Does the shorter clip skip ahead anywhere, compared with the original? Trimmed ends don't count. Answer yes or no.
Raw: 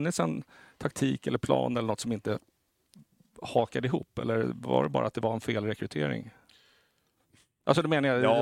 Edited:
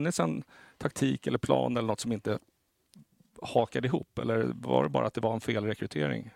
no